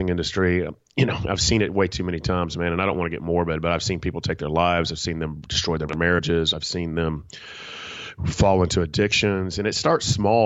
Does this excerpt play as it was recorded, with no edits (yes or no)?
yes